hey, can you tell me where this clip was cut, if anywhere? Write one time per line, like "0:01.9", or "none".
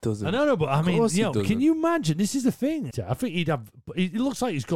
0:02.9